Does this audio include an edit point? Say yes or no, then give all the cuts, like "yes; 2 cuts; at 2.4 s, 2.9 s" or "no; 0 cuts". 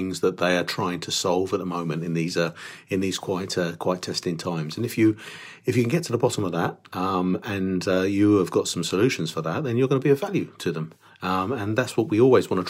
no; 0 cuts